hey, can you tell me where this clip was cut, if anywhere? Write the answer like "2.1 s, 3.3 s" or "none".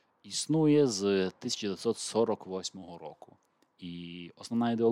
none